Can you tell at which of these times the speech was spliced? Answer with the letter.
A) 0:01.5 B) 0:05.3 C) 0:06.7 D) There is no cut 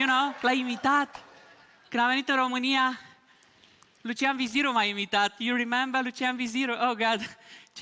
D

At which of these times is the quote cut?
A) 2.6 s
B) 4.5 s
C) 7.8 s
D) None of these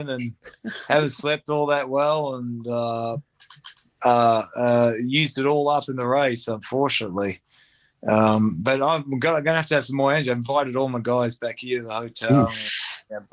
D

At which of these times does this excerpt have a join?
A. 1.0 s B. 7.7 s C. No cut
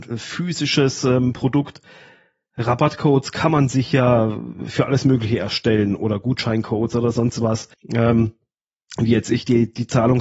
B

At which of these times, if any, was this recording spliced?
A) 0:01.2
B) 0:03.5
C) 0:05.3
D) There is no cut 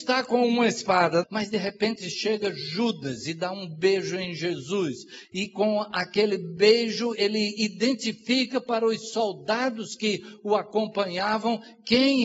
A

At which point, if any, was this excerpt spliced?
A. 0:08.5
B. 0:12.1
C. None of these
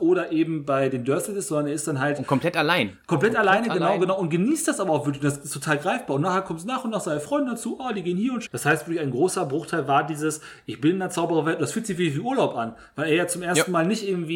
A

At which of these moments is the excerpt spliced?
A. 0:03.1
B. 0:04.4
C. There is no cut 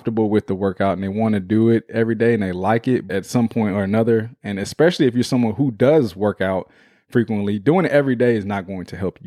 A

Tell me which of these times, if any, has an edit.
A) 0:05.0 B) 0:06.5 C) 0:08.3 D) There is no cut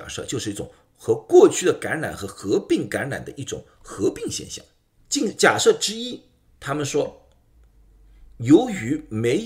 A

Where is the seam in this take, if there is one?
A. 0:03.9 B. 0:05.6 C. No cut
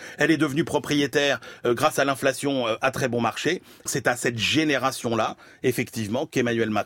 A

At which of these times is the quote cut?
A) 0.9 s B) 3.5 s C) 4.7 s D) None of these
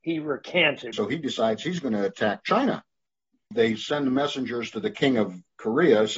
A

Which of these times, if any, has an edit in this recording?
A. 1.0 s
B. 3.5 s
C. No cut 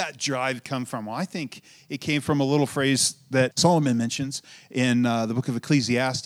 B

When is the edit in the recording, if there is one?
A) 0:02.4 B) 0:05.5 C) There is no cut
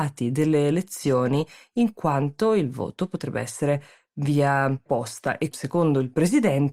B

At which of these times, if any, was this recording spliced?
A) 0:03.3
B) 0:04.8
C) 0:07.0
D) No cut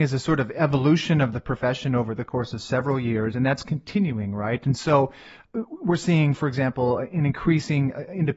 D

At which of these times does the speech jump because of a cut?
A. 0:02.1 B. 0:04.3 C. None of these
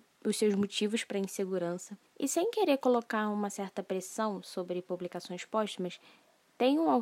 A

